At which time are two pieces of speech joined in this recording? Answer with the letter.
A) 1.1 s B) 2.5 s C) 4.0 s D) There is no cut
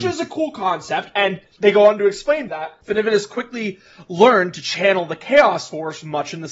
B